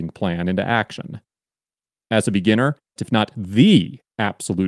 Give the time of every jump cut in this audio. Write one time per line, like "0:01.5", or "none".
0:03.0